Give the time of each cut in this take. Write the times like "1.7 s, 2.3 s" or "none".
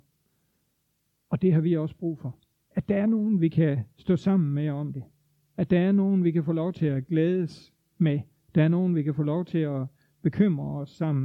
2.6 s

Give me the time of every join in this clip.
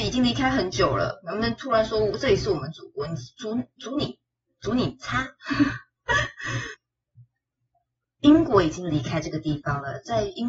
none

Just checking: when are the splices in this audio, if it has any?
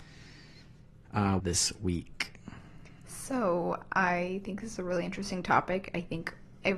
1.4 s

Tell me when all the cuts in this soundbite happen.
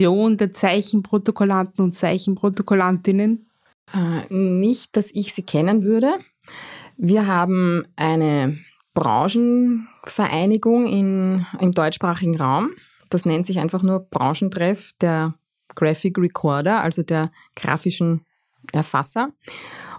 none

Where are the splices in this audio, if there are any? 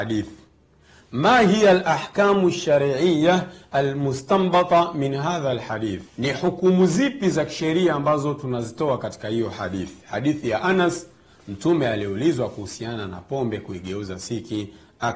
6.1 s

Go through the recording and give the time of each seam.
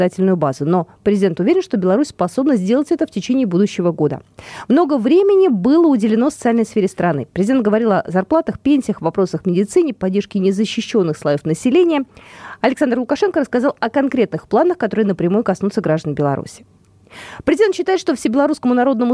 none

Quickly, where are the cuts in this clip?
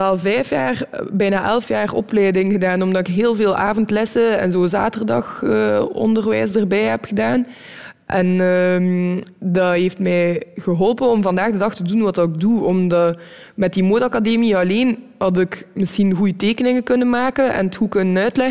none

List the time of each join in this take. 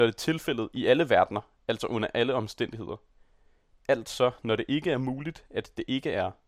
none

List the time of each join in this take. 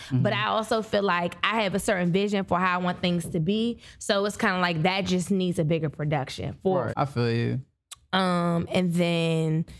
6.9 s

